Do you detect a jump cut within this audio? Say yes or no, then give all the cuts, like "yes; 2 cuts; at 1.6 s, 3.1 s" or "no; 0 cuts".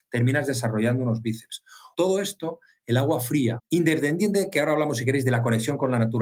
yes; 2 cuts; at 1.9 s, 3.6 s